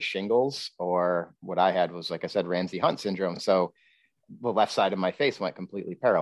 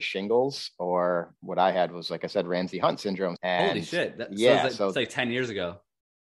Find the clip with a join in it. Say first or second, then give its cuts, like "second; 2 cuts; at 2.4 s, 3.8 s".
second; 1 cut; at 3.4 s